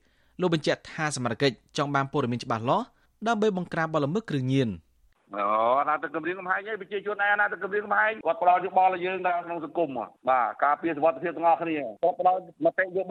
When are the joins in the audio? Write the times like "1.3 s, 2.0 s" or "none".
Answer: none